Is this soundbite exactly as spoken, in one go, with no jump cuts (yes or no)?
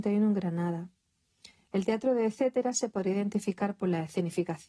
yes